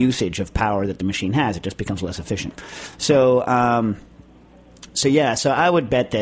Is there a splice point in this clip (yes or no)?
no